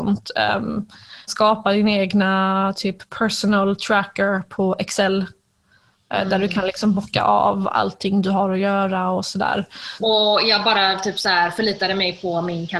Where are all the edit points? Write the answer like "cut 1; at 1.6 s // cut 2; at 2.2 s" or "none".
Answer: cut 1; at 1.3 s // cut 2; at 10.0 s